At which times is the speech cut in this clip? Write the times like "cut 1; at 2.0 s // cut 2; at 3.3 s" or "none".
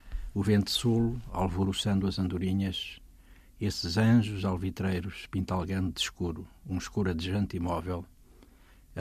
none

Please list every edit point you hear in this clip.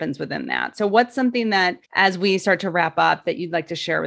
cut 1; at 1.8 s

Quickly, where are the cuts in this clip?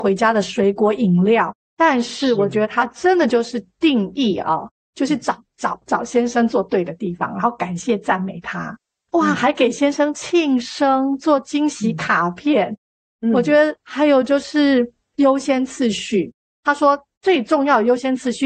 cut 1; at 1.7 s

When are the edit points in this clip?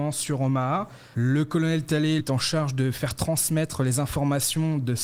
cut 1; at 1.1 s // cut 2; at 2.2 s

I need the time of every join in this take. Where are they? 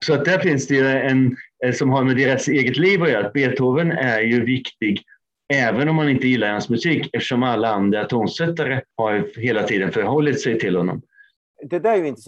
cut 1; at 8.9 s

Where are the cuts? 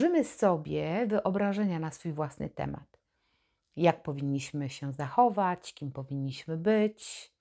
none

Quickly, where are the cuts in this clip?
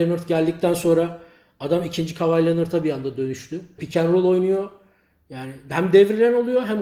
cut 1; at 3.8 s

